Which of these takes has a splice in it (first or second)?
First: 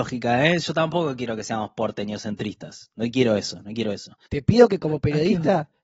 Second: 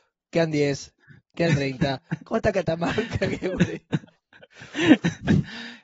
first